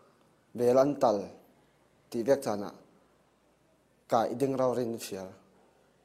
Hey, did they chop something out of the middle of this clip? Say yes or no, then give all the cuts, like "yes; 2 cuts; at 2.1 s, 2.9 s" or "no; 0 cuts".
no; 0 cuts